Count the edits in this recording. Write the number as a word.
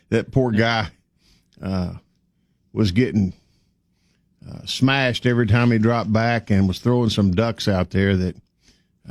zero